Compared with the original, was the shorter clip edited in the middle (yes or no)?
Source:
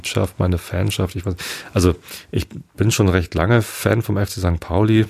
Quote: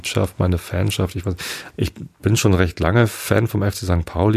yes